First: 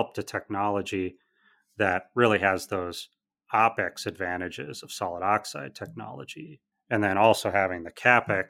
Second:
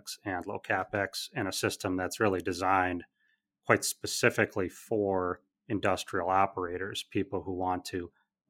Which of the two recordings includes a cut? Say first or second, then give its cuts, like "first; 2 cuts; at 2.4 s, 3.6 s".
first; 1 cut; at 6.7 s